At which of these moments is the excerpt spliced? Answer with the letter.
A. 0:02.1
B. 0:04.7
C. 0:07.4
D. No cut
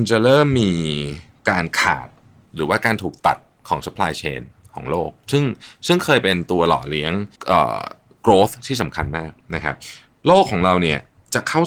C